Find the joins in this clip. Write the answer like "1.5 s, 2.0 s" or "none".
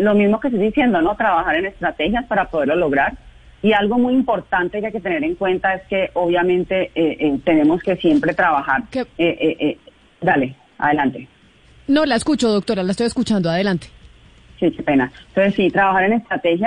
none